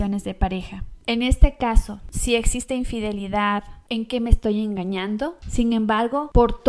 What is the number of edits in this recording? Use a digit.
2